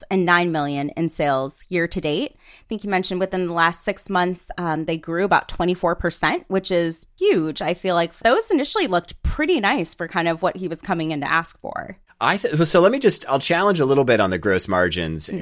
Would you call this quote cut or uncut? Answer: cut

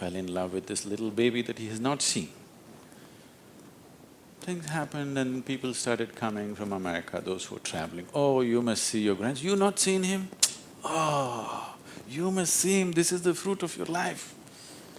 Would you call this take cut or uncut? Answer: uncut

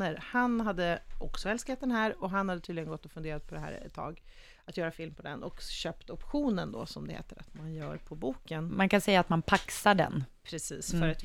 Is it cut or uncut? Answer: uncut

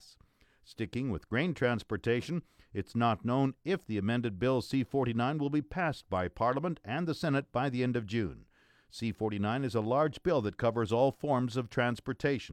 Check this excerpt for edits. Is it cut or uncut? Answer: uncut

